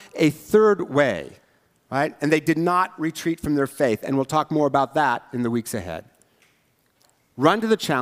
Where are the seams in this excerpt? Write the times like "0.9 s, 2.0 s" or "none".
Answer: none

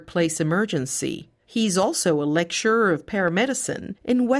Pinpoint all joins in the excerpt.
1.4 s

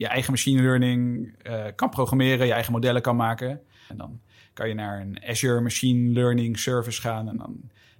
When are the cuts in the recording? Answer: 3.9 s

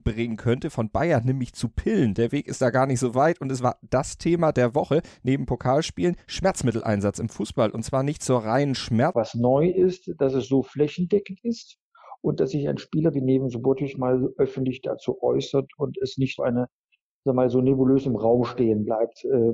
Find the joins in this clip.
9.1 s, 16.4 s

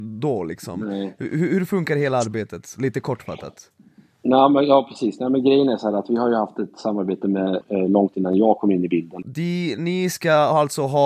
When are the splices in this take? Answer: 7.6 s, 9.2 s

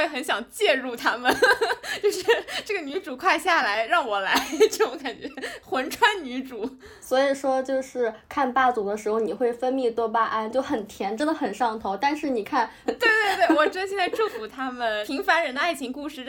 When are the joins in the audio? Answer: 12.9 s

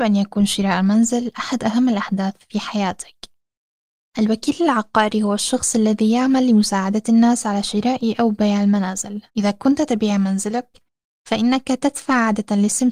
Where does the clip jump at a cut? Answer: 4.0 s, 9.3 s

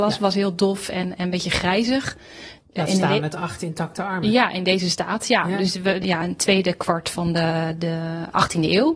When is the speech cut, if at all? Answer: 2.6 s, 6.0 s

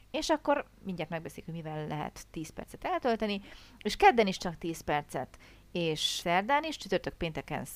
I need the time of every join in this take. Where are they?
6.2 s

